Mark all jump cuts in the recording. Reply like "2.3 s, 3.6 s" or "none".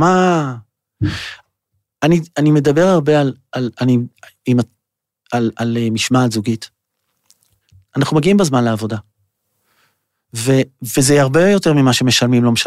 none

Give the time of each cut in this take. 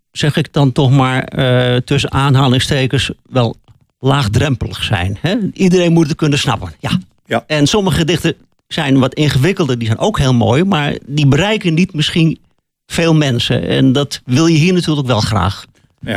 none

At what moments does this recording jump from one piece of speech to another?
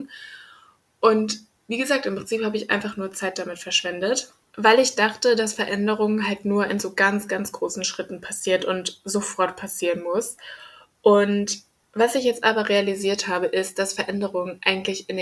none

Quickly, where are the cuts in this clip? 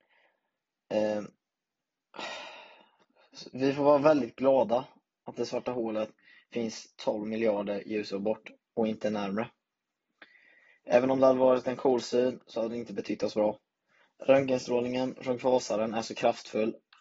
none

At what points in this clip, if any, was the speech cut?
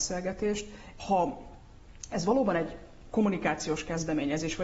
1.0 s

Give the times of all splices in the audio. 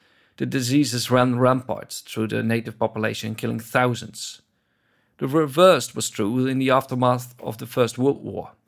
none

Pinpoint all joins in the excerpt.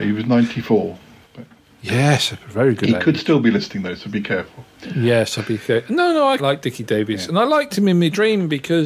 6.4 s

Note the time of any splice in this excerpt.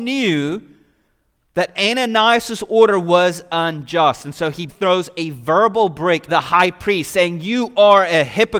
4.7 s, 6.3 s

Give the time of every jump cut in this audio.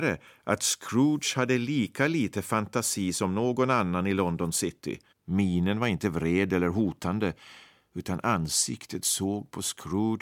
5.1 s

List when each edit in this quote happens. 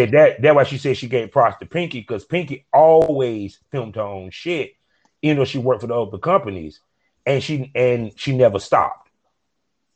none

